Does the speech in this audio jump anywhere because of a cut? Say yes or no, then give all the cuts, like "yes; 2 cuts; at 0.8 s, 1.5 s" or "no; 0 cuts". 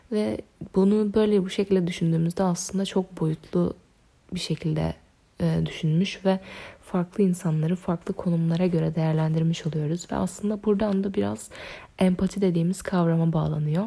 no; 0 cuts